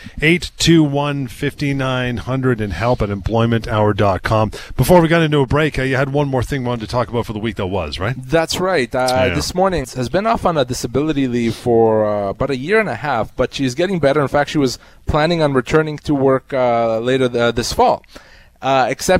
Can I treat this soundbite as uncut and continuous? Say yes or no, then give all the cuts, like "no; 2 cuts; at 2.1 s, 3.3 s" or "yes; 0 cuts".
no; 1 cut; at 9.8 s